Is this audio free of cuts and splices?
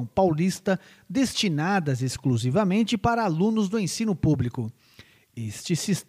yes; 0 cuts

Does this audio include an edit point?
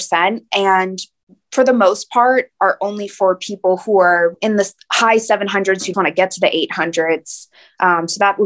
yes; 1 cut; at 5.9 s

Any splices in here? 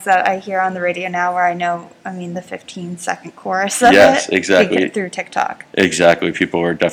no; 0 cuts

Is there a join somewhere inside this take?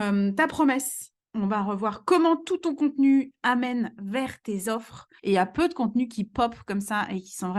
yes; 1 cut; at 5.2 s

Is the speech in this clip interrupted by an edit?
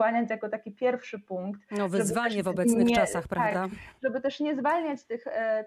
no; 0 cuts

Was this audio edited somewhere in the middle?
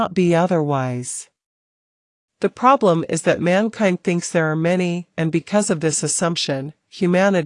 yes; 1 cut; at 5.1 s

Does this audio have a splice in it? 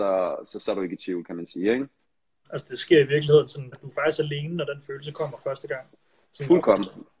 yes; 2 cuts; at 2.4 s, 3.7 s

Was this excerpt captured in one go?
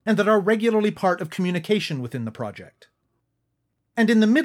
yes; 0 cuts

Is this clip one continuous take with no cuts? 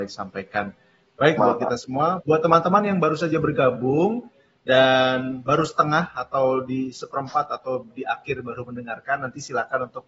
no; 1 cut; at 1.4 s

